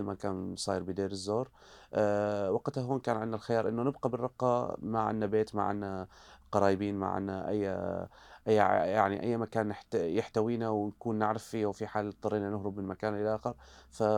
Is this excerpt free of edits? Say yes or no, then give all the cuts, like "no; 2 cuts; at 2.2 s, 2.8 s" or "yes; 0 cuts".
yes; 0 cuts